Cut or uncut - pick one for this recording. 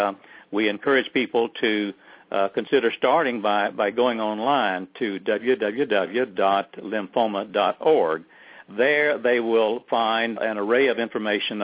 cut